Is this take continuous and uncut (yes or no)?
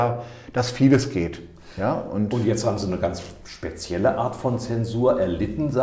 yes